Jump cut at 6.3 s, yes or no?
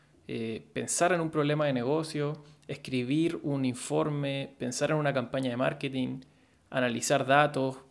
no